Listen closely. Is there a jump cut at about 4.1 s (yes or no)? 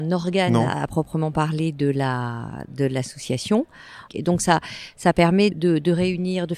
yes